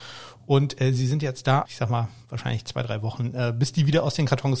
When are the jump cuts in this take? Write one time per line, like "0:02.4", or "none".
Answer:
0:01.7